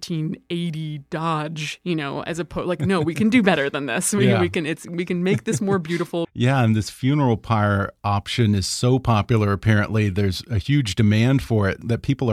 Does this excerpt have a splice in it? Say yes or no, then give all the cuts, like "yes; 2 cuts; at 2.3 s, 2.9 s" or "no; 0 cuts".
yes; 1 cut; at 6.2 s